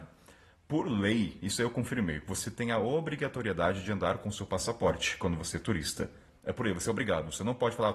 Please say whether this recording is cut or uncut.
uncut